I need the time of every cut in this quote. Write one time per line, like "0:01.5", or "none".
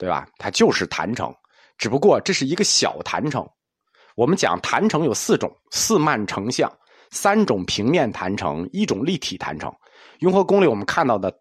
none